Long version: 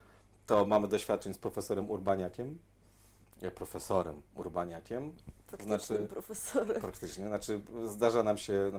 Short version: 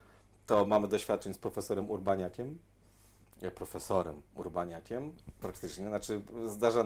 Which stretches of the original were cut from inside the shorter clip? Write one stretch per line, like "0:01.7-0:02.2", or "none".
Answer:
0:05.4-0:06.8